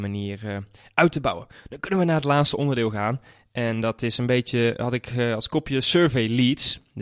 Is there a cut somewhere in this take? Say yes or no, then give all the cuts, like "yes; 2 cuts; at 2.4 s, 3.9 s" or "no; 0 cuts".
yes; 1 cut; at 4.8 s